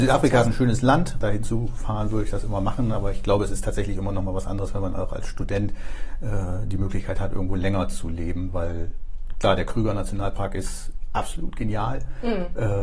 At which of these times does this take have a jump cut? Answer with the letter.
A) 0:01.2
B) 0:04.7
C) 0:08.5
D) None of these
A